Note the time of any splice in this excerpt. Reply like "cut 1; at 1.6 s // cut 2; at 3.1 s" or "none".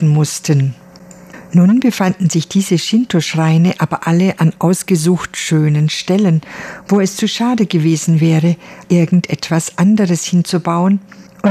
cut 1; at 8.8 s